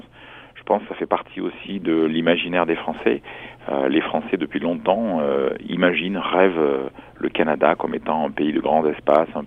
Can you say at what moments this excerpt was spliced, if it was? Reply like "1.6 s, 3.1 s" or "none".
none